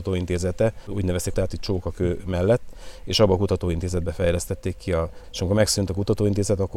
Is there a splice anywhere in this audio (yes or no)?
yes